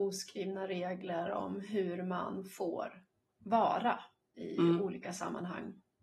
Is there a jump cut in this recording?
no; 0 cuts

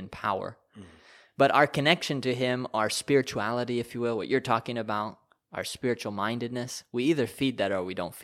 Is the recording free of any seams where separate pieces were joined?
yes; 0 cuts

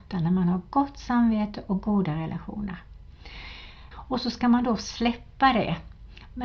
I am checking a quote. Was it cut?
yes; 1 cut; at 3.9 s

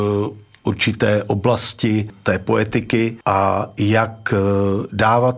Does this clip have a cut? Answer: yes; 1 cut; at 3.2 s

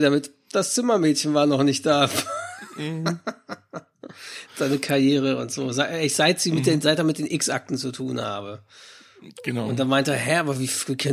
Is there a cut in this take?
yes; 1 cut; at 4.5 s

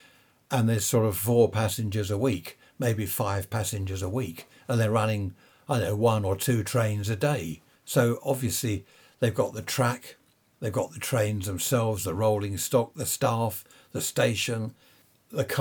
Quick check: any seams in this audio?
no; 0 cuts

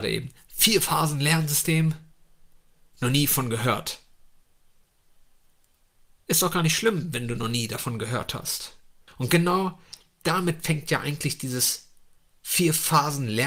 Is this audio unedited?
no; 1 cut; at 9.1 s

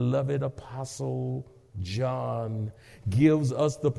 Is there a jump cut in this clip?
no; 0 cuts

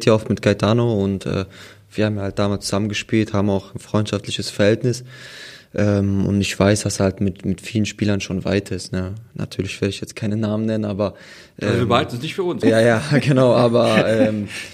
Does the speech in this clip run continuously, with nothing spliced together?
no; 1 cut; at 12.6 s

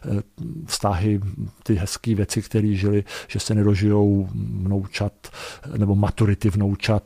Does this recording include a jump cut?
no; 0 cuts

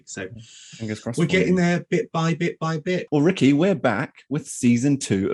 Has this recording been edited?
yes; 1 cut; at 3.1 s

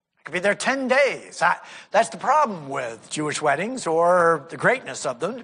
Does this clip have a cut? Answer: no; 0 cuts

